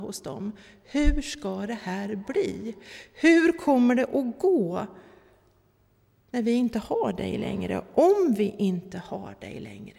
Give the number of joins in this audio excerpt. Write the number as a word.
zero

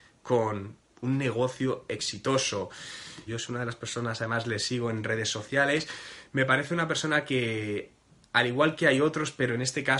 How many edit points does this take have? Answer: one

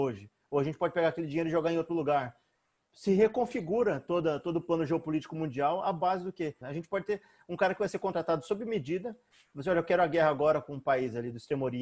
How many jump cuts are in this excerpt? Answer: one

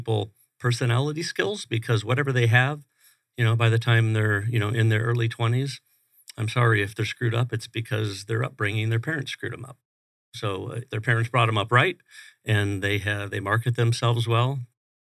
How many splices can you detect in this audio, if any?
zero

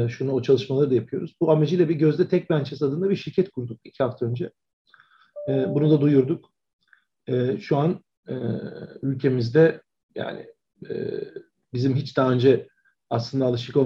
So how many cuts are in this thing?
zero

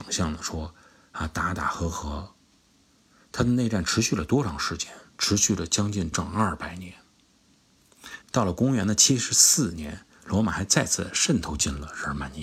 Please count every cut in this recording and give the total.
two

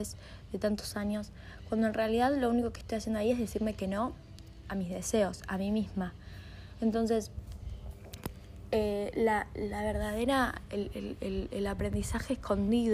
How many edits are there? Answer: zero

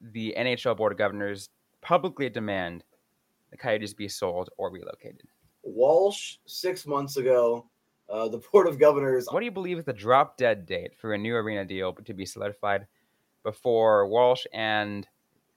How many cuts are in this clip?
one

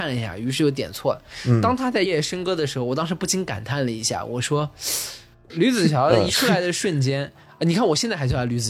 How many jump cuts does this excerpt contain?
two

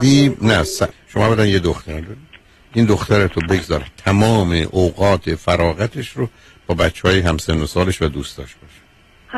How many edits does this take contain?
one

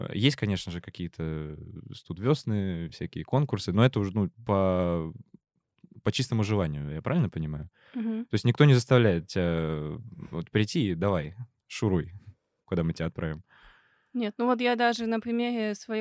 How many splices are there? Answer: zero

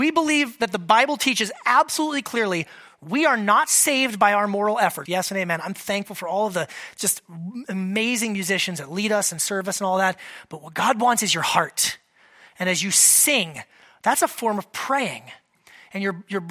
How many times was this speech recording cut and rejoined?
one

